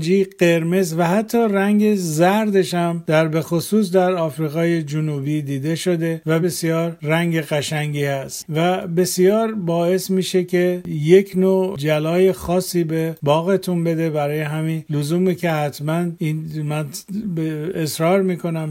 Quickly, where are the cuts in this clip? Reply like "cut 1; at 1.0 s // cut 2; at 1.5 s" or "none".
cut 1; at 6.4 s